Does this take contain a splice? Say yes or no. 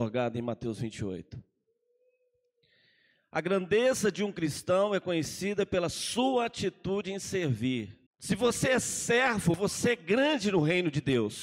yes